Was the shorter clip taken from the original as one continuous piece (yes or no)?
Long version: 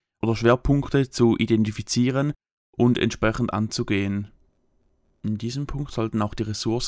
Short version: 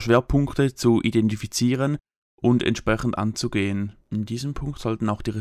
no